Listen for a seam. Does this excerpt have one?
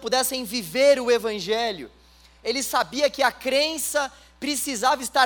no; 0 cuts

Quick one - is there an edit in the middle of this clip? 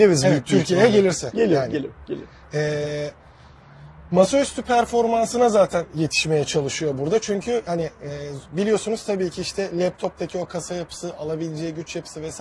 no; 0 cuts

